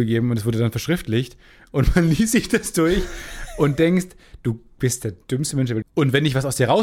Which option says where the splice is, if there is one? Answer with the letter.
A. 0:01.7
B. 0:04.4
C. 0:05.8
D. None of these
C